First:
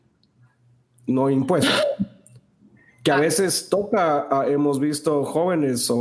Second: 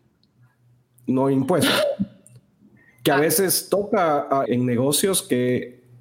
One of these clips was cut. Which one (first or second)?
second